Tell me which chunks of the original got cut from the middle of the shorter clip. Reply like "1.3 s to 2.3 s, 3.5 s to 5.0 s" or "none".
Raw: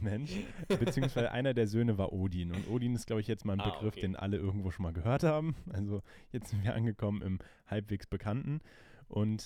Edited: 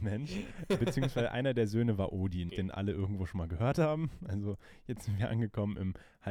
2.5 s to 3.9 s